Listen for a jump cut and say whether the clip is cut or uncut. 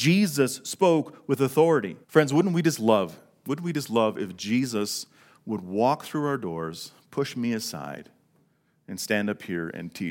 cut